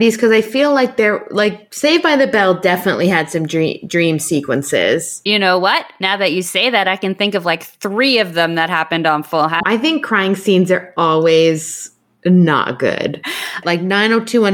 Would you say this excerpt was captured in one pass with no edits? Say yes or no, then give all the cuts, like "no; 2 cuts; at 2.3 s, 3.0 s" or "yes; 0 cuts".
no; 2 cuts; at 9.6 s, 13.6 s